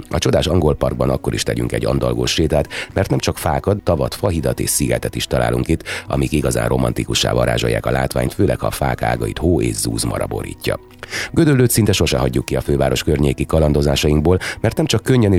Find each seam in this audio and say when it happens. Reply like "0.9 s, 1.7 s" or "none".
3.8 s

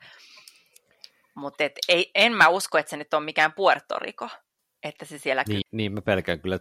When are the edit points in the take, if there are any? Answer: 1.8 s, 5.6 s

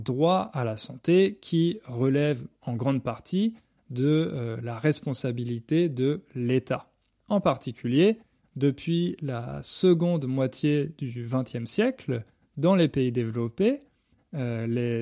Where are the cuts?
7.2 s

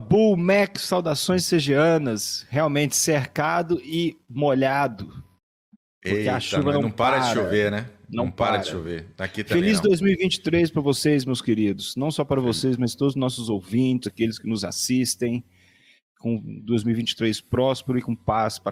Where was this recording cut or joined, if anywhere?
14.0 s

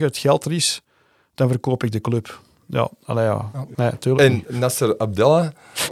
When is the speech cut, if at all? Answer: 3.7 s

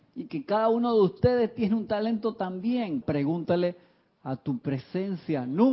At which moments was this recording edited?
3.0 s

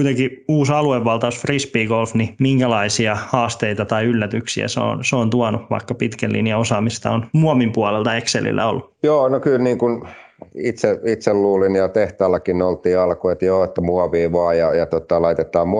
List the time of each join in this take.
none

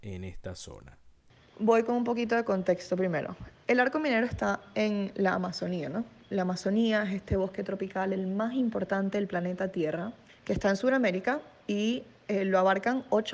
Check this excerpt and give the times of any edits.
none

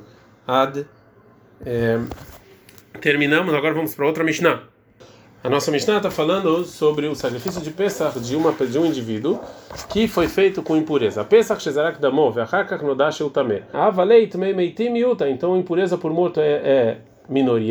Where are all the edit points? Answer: 13.7 s

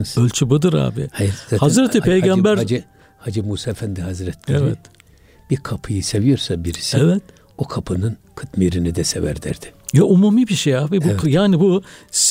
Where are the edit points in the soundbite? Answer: none

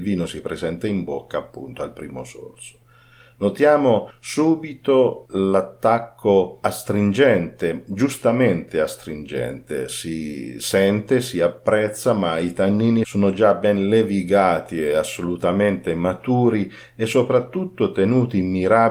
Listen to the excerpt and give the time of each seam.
none

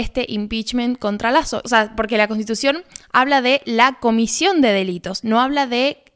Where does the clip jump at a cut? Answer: 1.6 s

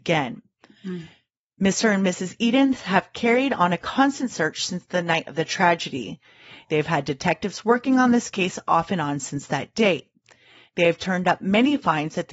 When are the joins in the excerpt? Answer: none

